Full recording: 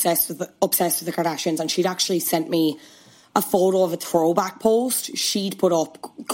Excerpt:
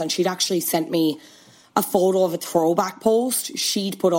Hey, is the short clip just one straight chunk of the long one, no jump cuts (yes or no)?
yes